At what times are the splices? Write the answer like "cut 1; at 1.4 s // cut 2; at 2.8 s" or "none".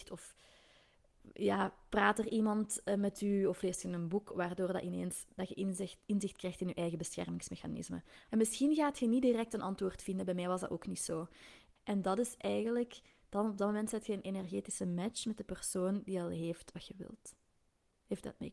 cut 1; at 8.3 s // cut 2; at 11.8 s